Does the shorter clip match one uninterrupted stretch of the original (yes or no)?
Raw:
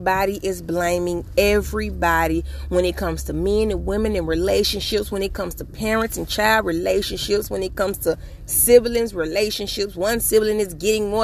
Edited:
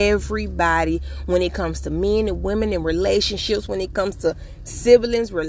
no